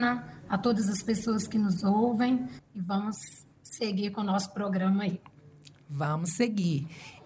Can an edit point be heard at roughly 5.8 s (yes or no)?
no